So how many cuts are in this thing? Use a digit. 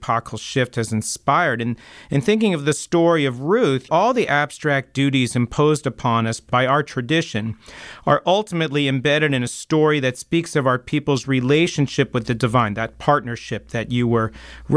1